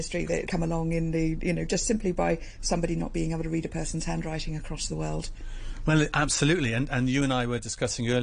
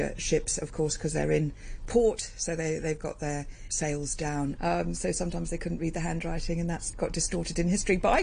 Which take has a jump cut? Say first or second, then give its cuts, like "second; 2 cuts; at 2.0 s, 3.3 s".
second; 2 cuts; at 4.6 s, 6.9 s